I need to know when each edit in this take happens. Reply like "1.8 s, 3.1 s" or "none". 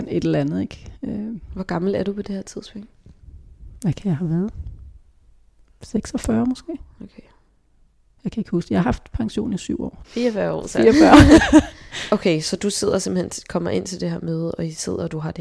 10.0 s